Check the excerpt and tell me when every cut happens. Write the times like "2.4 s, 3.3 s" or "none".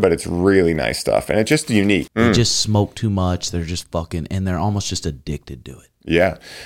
2.1 s